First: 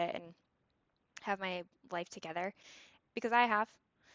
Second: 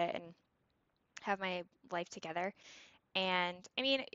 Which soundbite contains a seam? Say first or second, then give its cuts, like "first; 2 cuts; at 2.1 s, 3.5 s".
first; 1 cut; at 3.0 s